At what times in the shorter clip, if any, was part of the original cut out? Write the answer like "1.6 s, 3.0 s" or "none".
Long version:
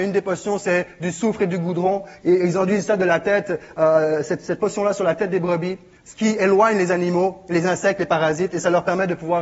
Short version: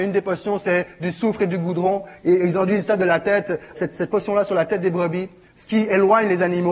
3.8 s